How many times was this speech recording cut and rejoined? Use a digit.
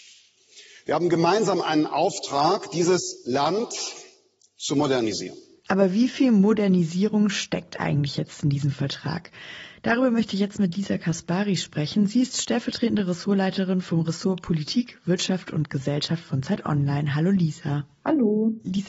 0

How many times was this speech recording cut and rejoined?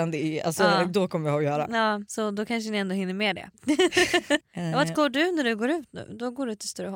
1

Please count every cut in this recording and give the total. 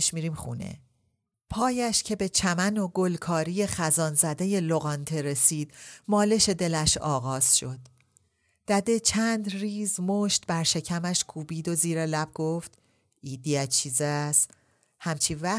1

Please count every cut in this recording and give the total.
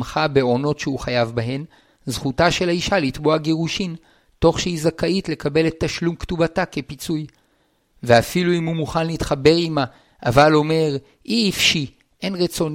0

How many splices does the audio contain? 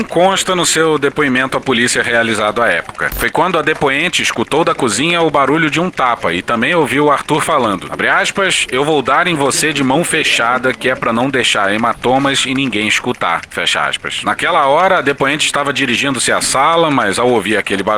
1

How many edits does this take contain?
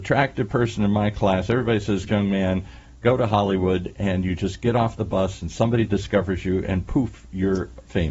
1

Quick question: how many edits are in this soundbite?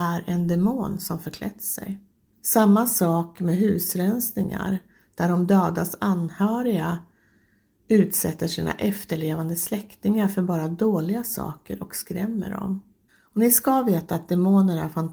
2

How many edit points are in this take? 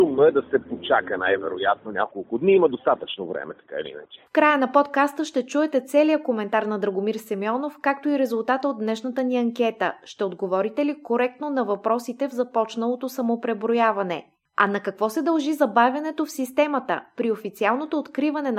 1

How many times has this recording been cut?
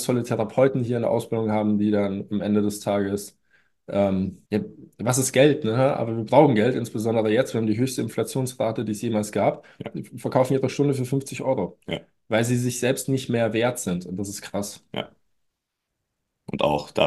1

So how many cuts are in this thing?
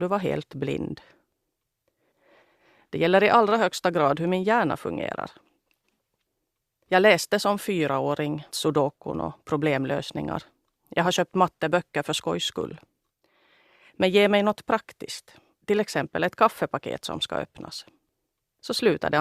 1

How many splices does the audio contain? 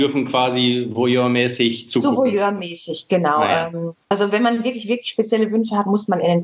0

